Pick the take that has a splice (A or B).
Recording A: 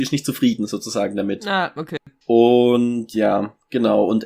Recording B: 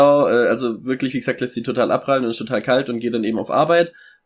A